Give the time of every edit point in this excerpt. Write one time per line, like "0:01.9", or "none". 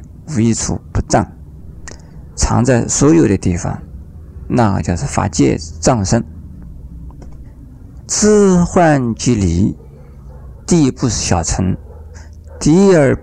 0:08.0